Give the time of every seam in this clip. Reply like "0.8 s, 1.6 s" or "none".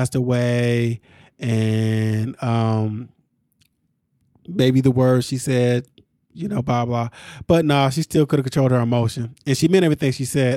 none